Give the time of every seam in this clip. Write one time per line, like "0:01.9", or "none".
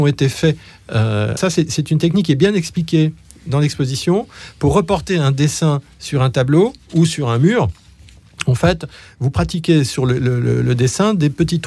0:01.4